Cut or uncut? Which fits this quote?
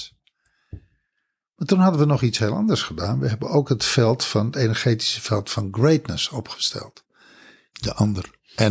cut